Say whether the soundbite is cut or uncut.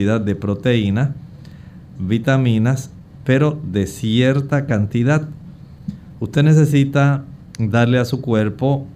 cut